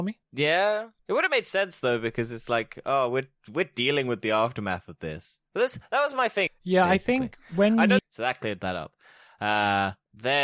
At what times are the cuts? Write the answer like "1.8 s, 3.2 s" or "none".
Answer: 6.5 s, 8.0 s